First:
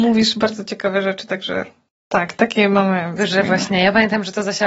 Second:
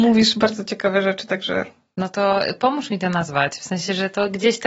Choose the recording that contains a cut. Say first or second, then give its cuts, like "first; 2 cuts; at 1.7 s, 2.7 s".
first; 2 cuts; at 1.9 s, 3.2 s